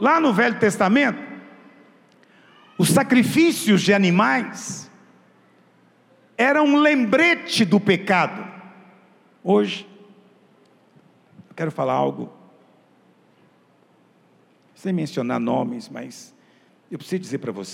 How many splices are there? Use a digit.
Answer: 1